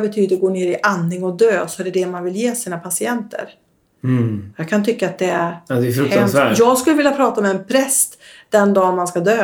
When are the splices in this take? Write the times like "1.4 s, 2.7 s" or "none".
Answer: none